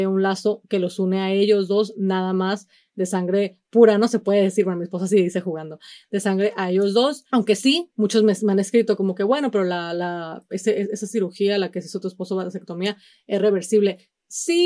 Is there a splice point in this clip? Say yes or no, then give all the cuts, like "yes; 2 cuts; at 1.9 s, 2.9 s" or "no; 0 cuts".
yes; 1 cut; at 7.3 s